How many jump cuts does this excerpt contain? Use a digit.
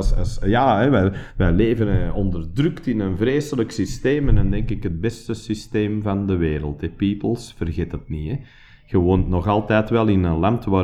0